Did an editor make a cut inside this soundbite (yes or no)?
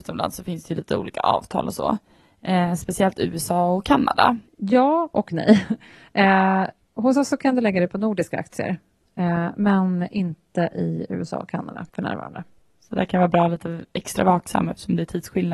yes